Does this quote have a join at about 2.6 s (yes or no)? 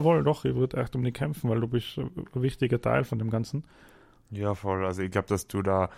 no